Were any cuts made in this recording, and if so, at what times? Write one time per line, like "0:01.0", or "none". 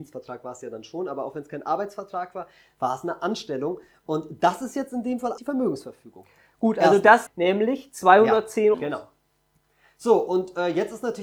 0:05.4
0:07.3
0:08.7